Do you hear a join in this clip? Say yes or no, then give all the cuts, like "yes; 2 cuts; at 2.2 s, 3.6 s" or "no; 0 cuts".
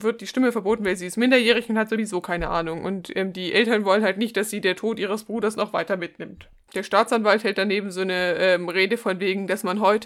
no; 0 cuts